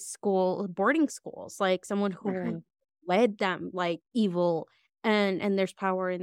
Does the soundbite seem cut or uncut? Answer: cut